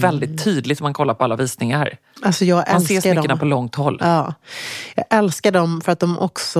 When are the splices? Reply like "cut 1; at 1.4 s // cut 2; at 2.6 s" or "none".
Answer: none